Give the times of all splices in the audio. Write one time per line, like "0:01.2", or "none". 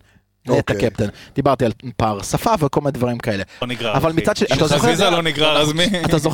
0:03.6